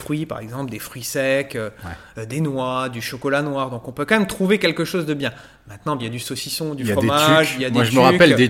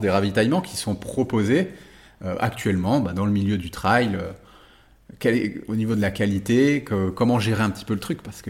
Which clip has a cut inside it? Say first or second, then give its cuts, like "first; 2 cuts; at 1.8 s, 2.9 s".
first; 1 cut; at 6.0 s